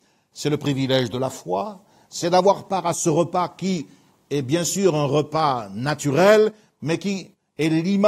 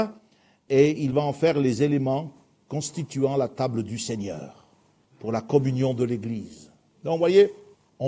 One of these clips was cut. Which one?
second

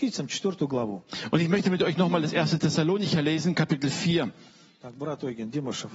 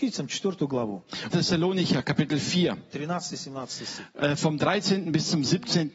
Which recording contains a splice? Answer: second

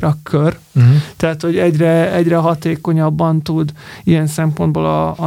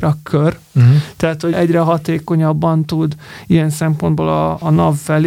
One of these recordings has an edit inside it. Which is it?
second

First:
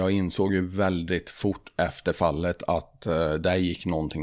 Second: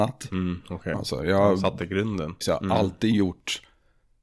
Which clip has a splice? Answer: second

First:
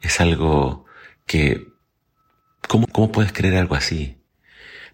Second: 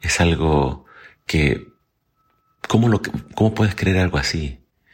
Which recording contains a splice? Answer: first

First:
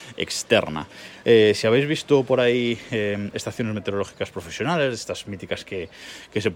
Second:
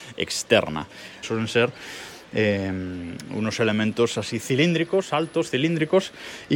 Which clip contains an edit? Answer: second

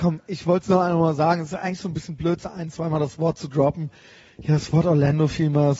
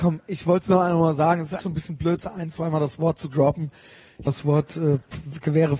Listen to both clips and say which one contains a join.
second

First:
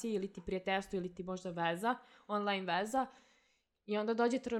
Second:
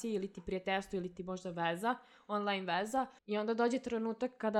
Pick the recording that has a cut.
second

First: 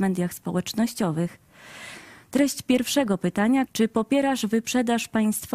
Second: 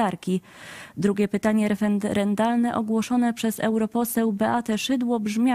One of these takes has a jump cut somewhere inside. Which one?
first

